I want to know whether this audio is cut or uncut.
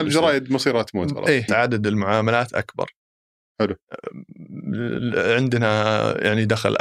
cut